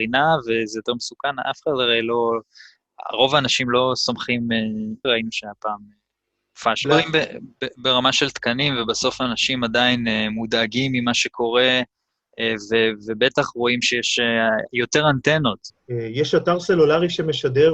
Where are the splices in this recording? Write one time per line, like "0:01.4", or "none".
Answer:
0:05.0
0:06.8
0:15.7